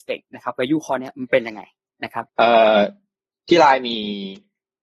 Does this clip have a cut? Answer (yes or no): yes